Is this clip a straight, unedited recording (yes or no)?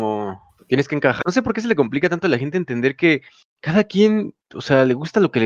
no